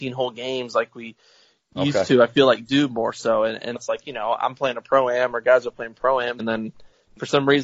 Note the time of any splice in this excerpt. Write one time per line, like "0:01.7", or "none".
0:03.8
0:06.4